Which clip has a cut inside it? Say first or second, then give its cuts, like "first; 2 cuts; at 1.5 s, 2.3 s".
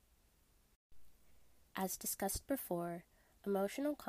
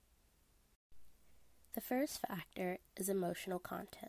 first; 1 cut; at 1.6 s